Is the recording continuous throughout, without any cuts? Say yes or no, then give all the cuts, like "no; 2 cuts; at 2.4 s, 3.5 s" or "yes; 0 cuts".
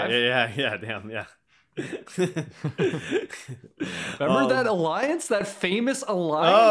yes; 0 cuts